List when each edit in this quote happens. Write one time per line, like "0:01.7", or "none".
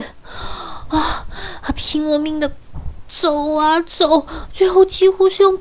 none